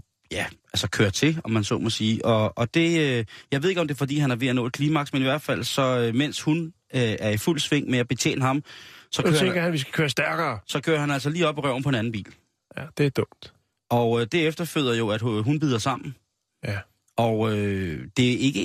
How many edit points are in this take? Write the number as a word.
zero